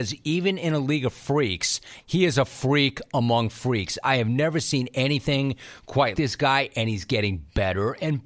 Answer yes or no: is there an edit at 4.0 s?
no